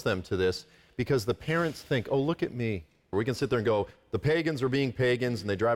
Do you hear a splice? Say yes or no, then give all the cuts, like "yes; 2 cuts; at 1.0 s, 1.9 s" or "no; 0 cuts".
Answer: yes; 1 cut; at 3.1 s